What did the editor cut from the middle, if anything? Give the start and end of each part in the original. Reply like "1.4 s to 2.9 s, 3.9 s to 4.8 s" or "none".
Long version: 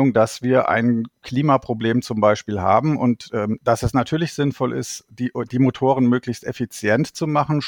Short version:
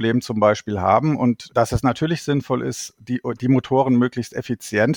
3.3 s to 3.6 s